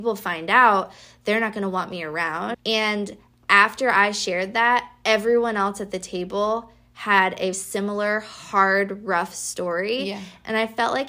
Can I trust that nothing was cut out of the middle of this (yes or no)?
no